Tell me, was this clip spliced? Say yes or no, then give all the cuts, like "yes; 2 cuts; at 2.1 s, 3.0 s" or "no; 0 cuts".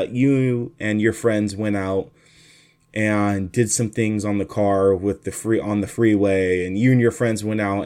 no; 0 cuts